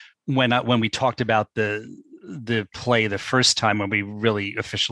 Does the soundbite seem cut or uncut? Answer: uncut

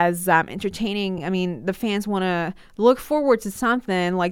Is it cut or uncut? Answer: uncut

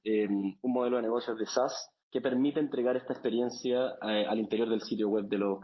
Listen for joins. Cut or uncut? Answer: cut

